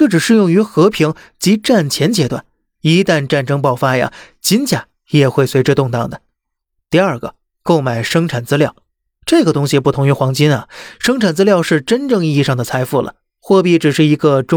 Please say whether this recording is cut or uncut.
uncut